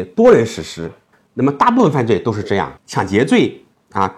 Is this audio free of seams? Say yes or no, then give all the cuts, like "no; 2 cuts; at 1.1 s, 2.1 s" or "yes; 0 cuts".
no; 1 cut; at 2.8 s